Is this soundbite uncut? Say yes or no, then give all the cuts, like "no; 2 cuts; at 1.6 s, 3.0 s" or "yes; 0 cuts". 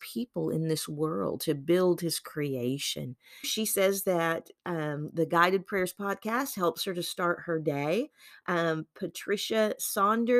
no; 1 cut; at 3.4 s